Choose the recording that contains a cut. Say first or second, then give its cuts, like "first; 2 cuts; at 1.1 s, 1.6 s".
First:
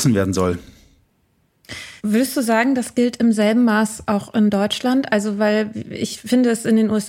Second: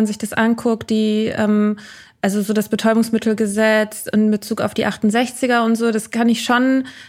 first; 1 cut; at 2.0 s